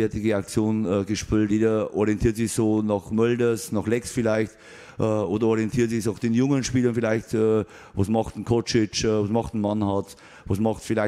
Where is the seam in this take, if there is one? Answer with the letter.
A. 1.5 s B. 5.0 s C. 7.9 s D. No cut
A